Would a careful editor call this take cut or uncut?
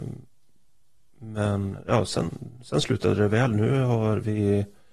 uncut